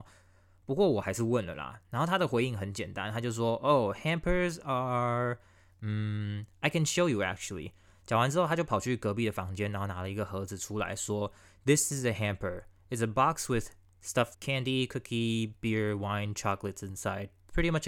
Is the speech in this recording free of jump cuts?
no; 1 cut; at 14.3 s

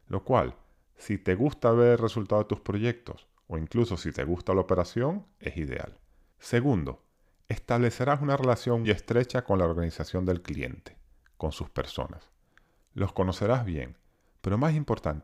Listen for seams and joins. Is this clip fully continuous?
no; 2 cuts; at 6.3 s, 8.8 s

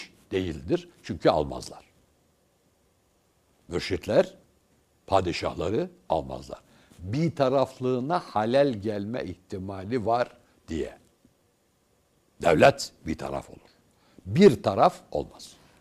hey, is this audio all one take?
yes; 0 cuts

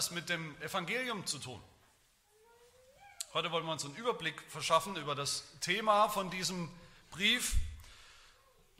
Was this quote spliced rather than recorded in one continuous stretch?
no; 0 cuts

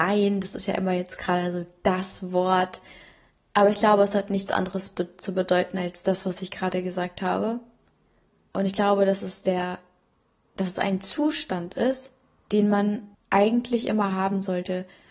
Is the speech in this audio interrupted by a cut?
no; 0 cuts

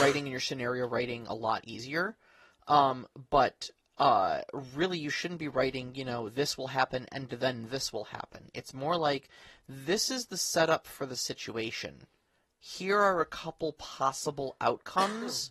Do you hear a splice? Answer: no; 0 cuts

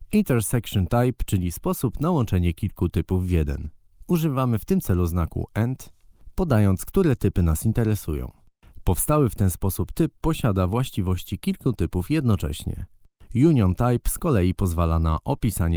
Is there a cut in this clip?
no; 0 cuts

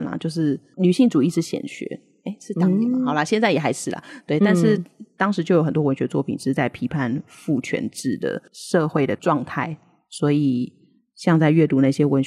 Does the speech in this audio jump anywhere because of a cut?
no; 0 cuts

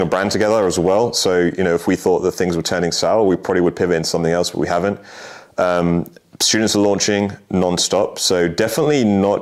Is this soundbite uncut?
yes; 0 cuts

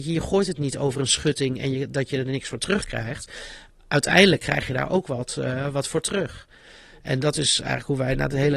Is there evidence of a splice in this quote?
no; 0 cuts

